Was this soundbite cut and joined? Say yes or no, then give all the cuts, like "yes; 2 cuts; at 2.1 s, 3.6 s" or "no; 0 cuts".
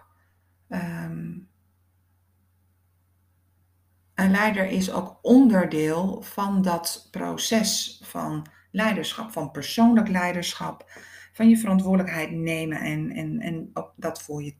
no; 0 cuts